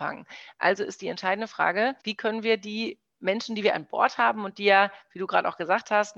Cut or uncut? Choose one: cut